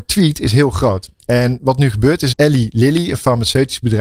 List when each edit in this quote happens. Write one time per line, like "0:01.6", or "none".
0:02.3